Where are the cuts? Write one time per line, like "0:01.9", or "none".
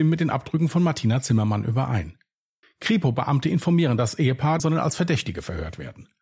0:02.6
0:04.6